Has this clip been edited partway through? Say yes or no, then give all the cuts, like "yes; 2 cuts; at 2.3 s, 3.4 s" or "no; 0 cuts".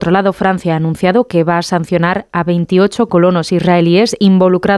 no; 0 cuts